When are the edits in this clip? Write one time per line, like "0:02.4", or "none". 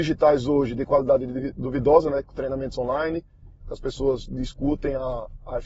0:03.6